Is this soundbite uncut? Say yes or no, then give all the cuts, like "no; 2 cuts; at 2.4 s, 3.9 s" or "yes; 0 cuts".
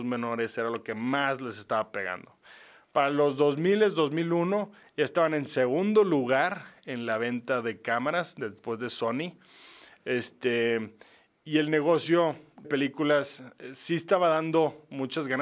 no; 1 cut; at 12.6 s